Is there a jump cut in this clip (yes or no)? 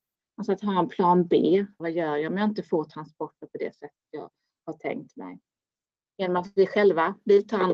yes